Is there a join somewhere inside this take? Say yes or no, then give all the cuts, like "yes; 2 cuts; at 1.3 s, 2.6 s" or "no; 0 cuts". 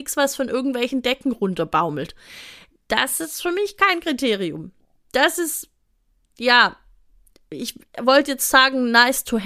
no; 0 cuts